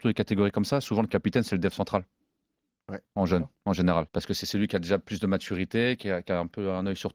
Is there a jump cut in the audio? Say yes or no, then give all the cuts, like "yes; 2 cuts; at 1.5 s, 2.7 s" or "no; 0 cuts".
yes; 1 cut; at 4.1 s